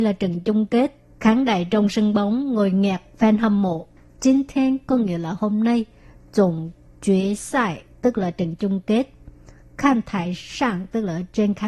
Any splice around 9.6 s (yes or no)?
yes